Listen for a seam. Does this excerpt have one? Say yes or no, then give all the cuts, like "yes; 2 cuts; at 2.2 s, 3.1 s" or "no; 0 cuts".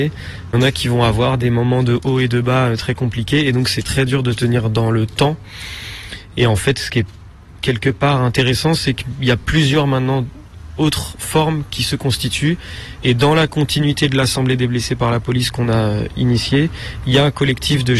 yes; 1 cut; at 3.8 s